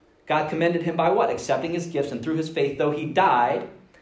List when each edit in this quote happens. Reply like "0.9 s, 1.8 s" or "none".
none